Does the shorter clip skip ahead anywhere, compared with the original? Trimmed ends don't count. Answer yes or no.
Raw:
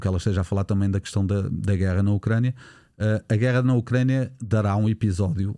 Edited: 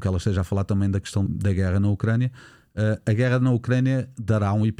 yes